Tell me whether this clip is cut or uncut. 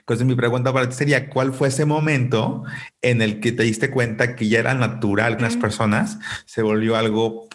cut